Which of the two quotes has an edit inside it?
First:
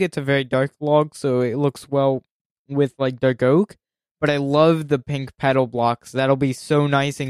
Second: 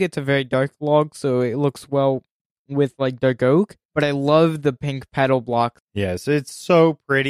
second; 2 cuts; at 3.8 s, 5.8 s

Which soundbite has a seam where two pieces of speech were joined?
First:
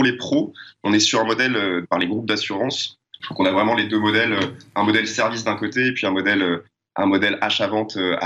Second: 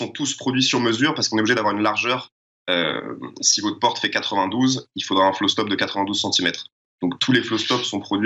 first; 2 cuts; at 1.8 s, 3.2 s

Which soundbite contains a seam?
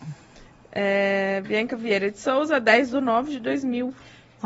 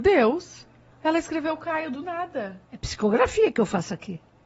second; 2 cuts; at 0.9 s, 2.6 s

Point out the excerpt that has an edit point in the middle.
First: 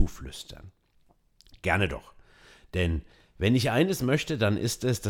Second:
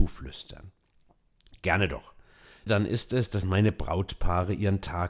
second; 1 cut; at 2.7 s

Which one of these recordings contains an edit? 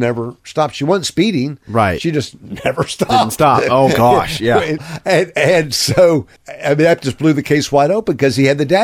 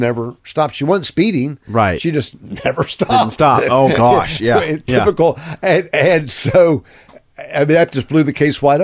first; 2 cuts; at 4.8 s, 6.4 s

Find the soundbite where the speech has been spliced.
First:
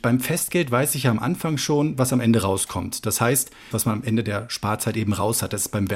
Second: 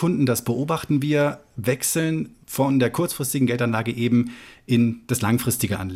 first; 1 cut; at 3.7 s

